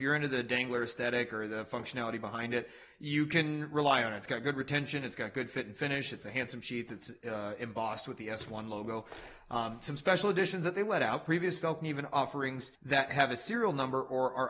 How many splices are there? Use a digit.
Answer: 1